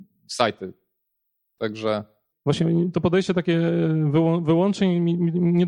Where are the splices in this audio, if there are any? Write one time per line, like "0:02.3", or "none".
0:02.3